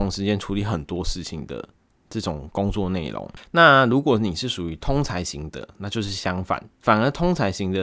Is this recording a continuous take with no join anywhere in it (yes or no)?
yes